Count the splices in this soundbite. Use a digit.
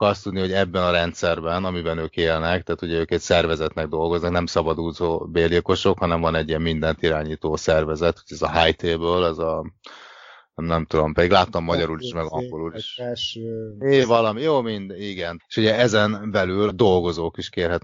2